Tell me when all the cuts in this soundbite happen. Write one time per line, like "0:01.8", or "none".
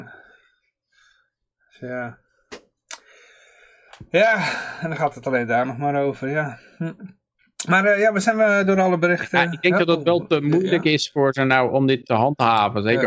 none